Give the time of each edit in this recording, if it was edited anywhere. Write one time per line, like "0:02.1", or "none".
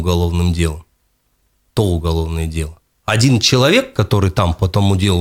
0:02.9